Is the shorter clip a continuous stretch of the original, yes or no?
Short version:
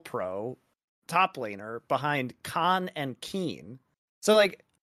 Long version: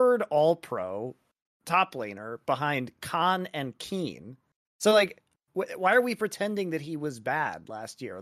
yes